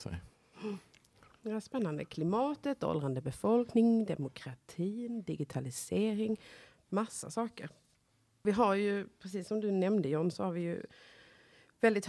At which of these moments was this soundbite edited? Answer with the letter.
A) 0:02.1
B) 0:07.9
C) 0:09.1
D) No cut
D